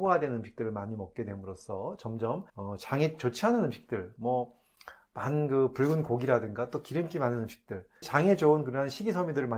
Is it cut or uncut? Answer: cut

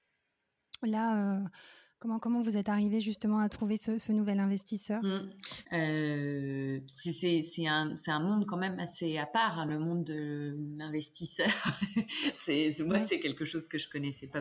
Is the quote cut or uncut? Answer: cut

